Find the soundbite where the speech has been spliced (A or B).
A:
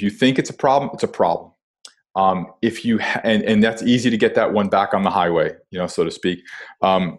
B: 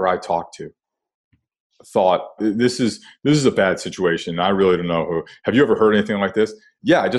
B